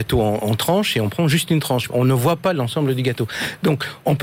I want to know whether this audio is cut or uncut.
cut